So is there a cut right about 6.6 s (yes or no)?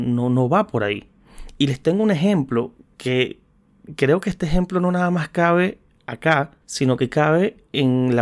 yes